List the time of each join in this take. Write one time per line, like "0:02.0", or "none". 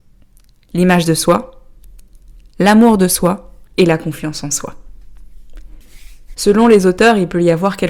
0:03.6
0:06.3